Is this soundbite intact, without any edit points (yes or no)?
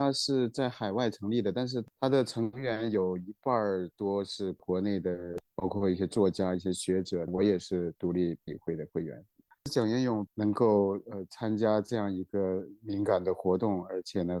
yes